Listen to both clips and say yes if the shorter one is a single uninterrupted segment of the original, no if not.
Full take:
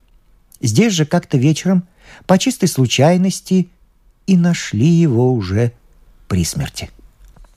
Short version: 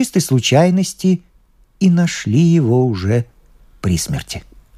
yes